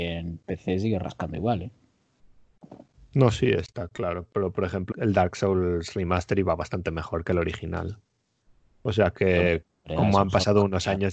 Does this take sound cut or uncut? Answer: cut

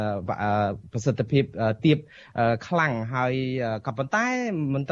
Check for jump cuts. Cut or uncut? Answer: uncut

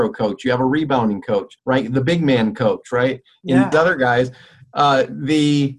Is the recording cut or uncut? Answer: cut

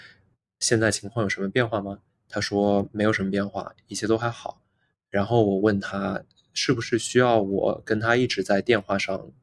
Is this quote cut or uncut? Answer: uncut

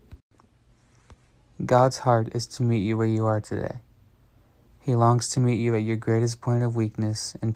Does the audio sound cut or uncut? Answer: uncut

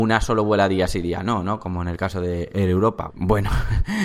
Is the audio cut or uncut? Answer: cut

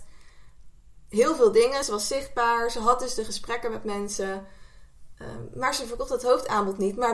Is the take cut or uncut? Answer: uncut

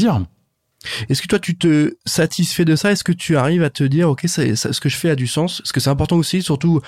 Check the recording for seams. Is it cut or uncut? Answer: uncut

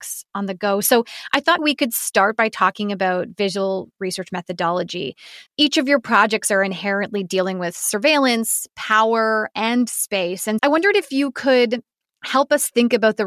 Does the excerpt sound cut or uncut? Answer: cut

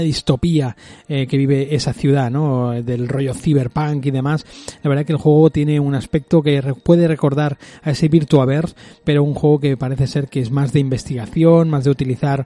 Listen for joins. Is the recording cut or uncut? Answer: uncut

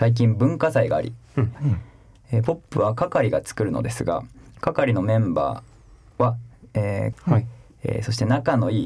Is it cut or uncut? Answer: cut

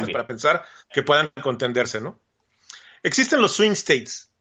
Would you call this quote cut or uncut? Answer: uncut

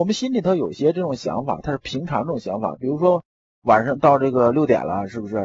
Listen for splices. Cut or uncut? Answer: uncut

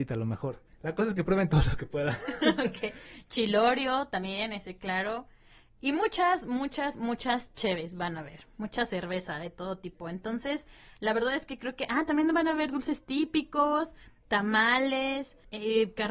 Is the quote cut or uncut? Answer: uncut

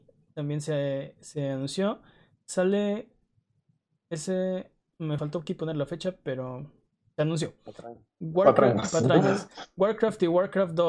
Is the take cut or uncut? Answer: cut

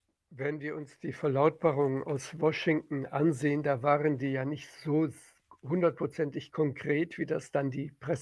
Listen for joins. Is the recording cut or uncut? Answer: uncut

